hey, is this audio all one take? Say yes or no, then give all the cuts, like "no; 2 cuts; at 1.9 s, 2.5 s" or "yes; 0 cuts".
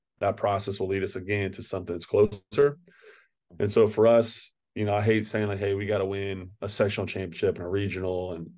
yes; 0 cuts